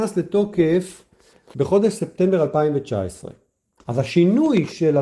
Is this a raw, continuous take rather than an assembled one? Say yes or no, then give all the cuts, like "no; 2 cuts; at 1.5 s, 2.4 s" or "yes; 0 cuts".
no; 1 cut; at 3.8 s